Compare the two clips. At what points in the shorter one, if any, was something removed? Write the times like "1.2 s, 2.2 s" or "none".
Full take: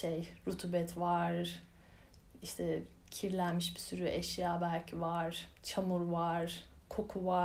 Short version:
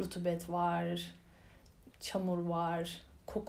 1.9 s